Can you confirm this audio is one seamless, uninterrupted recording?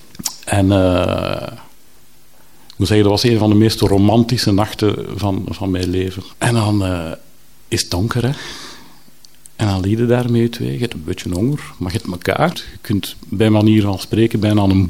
no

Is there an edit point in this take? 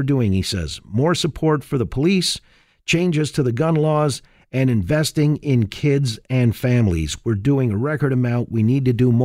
no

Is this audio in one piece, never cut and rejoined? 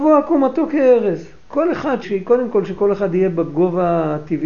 no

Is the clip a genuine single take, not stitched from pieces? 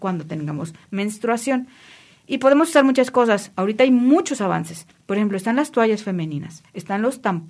yes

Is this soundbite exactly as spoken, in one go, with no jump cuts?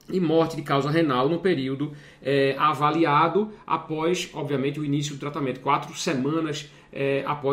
yes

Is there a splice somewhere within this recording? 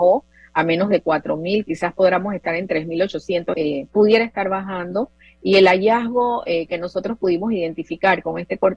yes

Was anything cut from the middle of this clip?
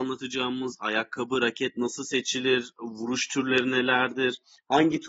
no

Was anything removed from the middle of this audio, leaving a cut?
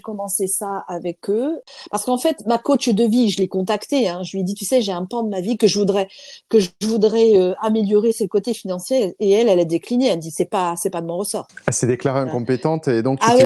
no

